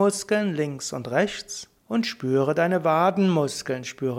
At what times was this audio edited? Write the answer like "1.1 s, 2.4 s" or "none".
1.8 s